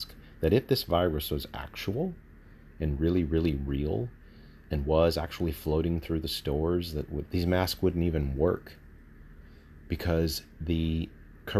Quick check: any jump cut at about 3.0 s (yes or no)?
no